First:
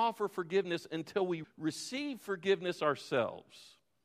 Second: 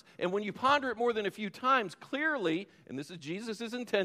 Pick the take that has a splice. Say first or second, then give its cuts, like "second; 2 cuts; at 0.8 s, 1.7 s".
first; 1 cut; at 1.4 s